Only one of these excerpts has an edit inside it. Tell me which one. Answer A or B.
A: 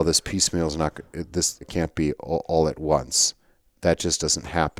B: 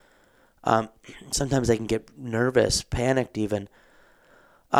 A